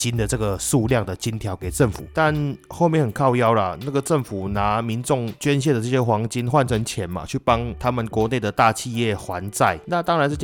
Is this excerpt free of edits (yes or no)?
yes